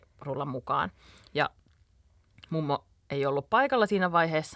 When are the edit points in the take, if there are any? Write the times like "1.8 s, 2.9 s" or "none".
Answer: none